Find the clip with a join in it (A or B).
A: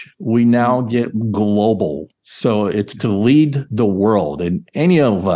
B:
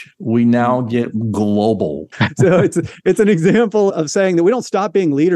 B